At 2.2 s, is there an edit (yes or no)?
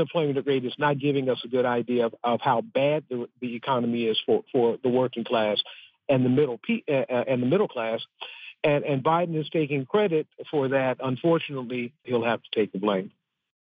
no